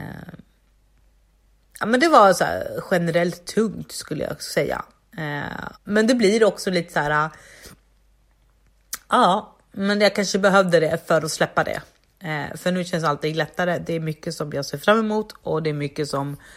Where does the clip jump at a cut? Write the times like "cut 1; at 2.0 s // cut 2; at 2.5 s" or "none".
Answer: cut 1; at 5.8 s